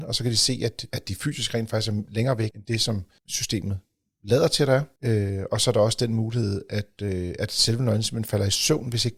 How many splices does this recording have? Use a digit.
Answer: 1